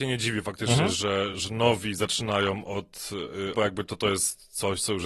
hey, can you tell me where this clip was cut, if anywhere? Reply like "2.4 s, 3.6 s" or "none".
1.3 s, 3.5 s